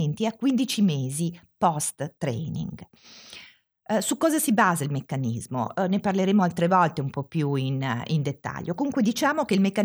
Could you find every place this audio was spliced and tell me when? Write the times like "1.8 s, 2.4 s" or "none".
none